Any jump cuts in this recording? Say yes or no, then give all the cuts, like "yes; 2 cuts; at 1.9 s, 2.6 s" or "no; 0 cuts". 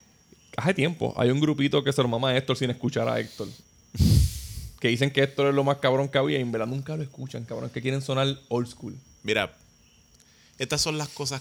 no; 0 cuts